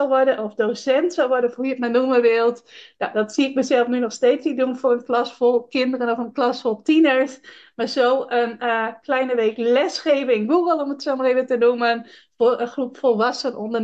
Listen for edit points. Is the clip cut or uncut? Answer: uncut